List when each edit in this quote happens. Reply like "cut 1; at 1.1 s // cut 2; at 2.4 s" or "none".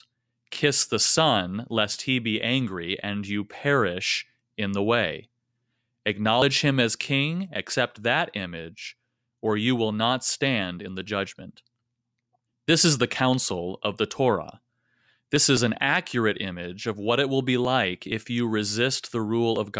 cut 1; at 12.5 s